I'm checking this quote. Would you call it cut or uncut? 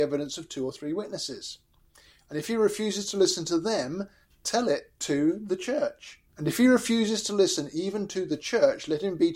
cut